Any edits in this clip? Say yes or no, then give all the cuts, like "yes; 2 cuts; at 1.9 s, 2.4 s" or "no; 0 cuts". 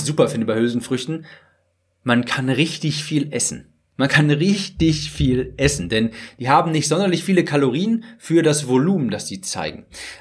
no; 0 cuts